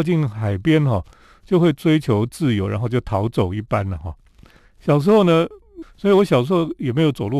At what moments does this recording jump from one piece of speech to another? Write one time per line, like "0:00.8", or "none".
0:04.6
0:05.8